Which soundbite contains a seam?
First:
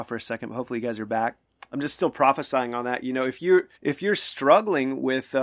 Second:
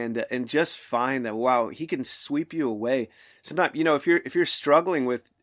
first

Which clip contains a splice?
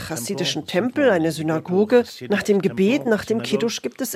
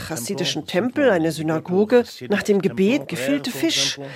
second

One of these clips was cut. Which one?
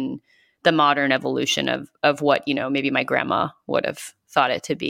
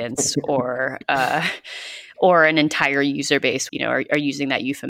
second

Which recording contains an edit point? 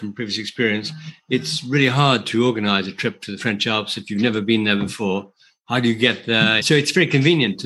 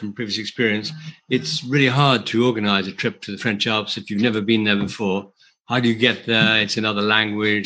first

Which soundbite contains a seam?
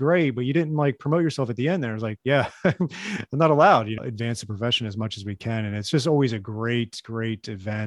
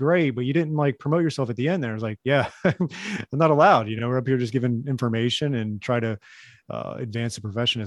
first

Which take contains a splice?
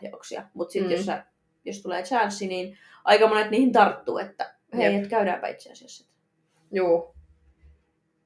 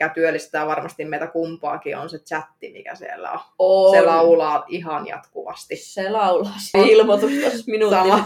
second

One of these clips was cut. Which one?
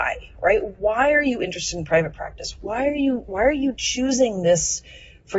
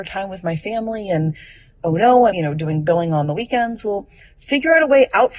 second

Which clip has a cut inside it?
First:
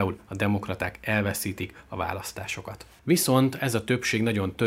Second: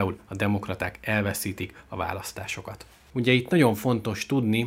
first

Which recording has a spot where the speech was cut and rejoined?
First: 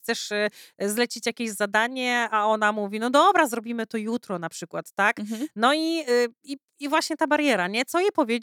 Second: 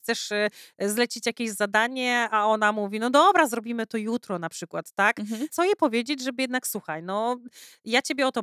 second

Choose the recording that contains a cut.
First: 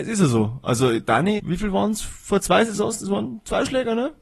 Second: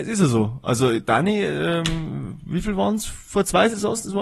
first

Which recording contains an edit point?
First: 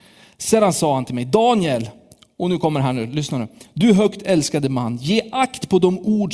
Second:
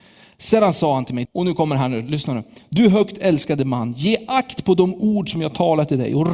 second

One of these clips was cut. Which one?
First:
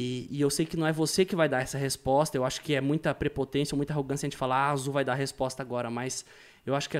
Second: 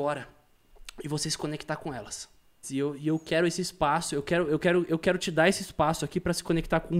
second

